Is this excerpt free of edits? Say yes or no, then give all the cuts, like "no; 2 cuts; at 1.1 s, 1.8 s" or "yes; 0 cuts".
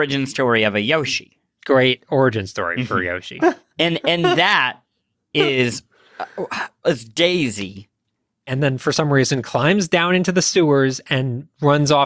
no; 3 cuts; at 3.4 s, 6.8 s, 8.5 s